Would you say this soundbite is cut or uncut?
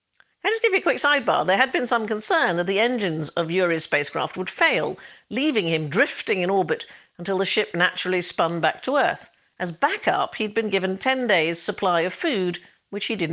uncut